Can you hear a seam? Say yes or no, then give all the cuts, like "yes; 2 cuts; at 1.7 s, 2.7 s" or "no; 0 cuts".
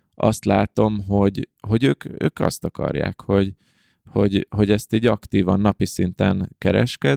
no; 0 cuts